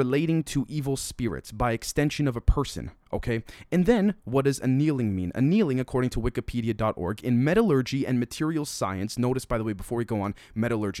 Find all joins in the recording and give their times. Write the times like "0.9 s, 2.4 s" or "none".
none

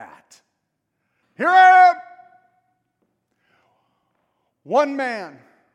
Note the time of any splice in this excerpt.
1.2 s

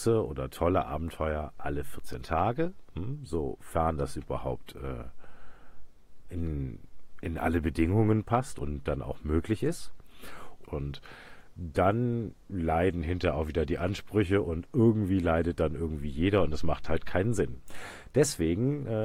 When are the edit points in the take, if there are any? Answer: 10.6 s

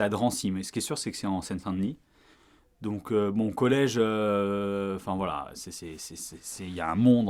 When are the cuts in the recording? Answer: none

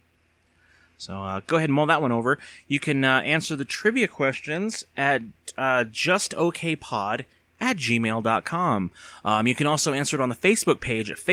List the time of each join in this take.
none

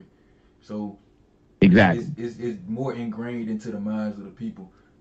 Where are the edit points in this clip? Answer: none

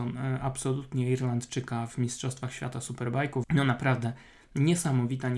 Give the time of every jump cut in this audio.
3.4 s

